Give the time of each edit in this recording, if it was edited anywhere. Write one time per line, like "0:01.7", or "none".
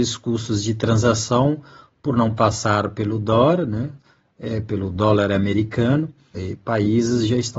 0:06.3